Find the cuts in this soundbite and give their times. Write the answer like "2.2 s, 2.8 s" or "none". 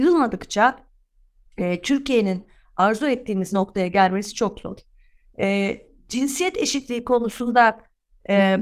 none

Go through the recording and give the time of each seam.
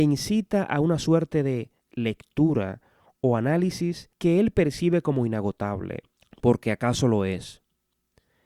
none

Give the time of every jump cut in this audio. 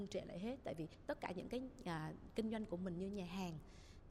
none

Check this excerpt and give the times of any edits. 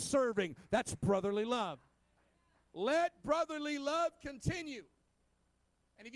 none

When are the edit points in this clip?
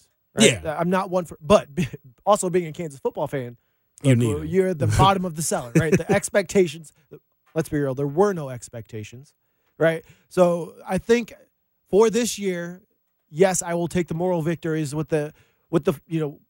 none

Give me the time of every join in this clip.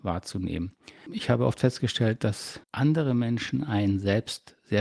1.1 s, 2.6 s

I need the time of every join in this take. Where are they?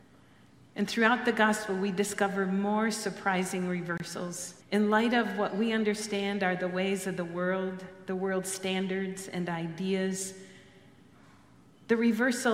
4.6 s

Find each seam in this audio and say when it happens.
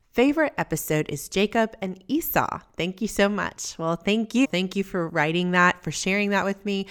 4.4 s

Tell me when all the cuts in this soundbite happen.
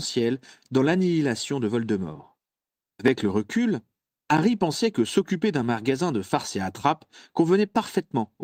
2.8 s

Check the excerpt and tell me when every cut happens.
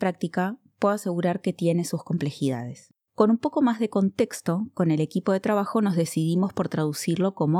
3.1 s

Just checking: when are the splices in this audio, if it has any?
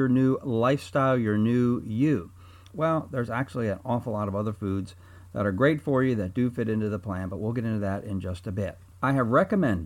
2.7 s

